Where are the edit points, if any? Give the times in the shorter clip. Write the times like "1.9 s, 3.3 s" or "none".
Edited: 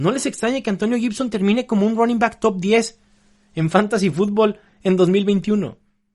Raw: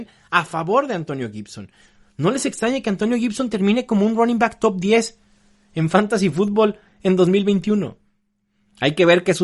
none